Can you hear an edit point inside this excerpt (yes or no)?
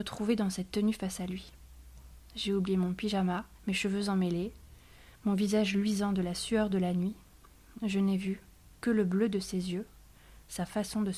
yes